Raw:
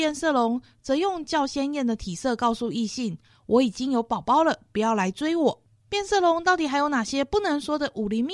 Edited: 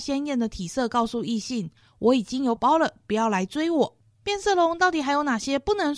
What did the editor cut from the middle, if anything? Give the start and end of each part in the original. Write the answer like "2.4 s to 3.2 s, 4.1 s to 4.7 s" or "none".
4.0 s to 4.2 s